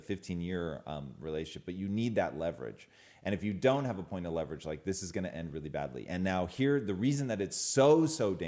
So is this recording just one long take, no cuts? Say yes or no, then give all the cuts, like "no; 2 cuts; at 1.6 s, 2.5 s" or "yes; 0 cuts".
yes; 0 cuts